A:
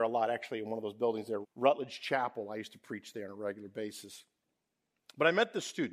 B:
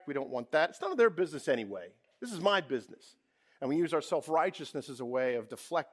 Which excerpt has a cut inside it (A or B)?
A